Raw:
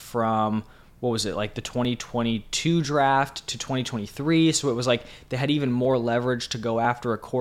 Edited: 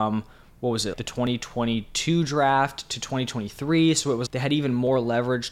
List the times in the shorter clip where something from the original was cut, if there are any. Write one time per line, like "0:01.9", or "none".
0:00.9
0:04.3